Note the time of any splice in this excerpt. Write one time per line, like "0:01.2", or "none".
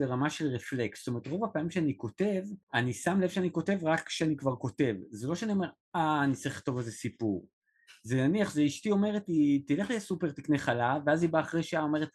0:02.6